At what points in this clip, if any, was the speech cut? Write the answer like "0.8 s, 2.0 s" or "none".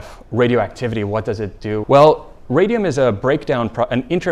1.8 s